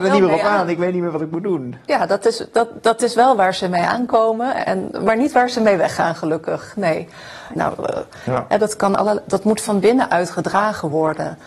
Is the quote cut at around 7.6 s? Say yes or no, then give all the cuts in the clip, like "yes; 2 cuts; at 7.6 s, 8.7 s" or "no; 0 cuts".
yes; 1 cut; at 7.6 s